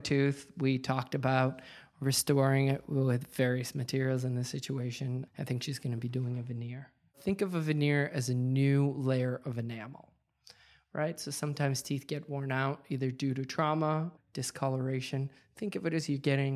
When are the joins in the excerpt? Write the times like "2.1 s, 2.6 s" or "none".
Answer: 14.2 s

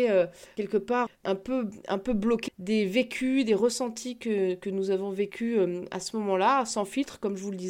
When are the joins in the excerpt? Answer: 1.1 s, 2.5 s

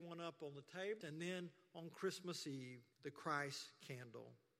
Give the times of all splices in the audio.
1.0 s, 2.9 s

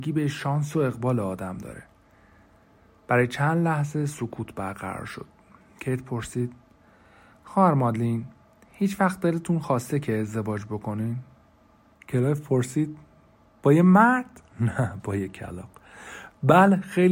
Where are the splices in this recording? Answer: 11.9 s, 14.5 s

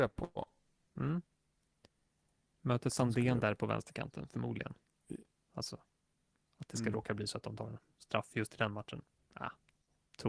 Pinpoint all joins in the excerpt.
5.5 s

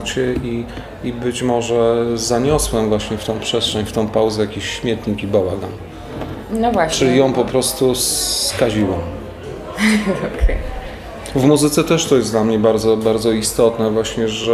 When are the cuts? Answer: none

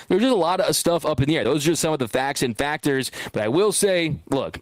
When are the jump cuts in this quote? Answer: none

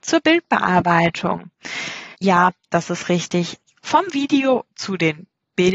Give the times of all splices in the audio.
2.1 s, 3.6 s

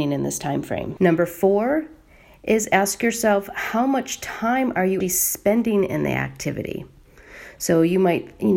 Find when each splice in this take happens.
1.0 s, 5.0 s

